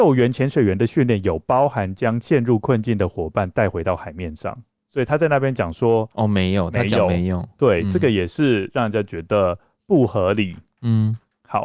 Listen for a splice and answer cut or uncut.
uncut